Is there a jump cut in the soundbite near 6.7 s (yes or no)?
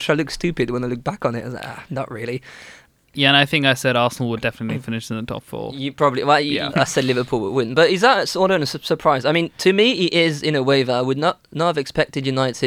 yes